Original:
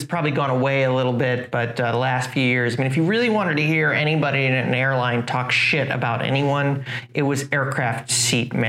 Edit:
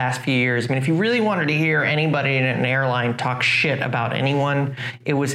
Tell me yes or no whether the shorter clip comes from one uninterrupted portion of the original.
yes